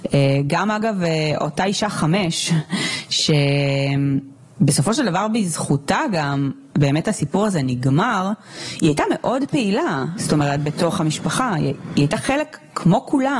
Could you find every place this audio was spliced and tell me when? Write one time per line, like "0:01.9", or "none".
0:10.2